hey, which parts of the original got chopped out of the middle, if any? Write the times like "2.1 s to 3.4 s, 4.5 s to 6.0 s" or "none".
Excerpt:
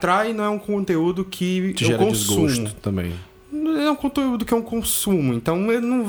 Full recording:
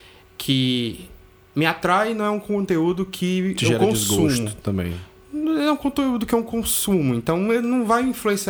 none